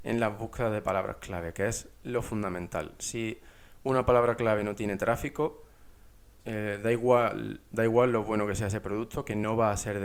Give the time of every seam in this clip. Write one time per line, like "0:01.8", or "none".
0:06.4